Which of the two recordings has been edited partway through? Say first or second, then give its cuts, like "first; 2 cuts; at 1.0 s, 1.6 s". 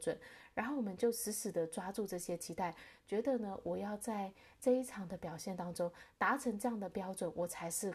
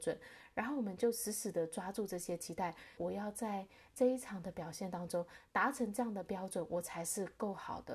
second; 1 cut; at 3.0 s